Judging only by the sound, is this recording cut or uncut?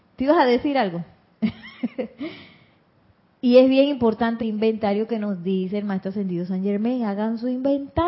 cut